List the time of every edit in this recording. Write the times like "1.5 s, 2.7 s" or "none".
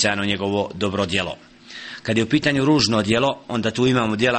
none